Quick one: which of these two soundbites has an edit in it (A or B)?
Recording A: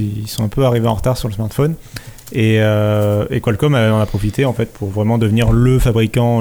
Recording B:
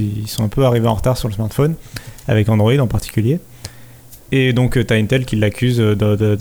B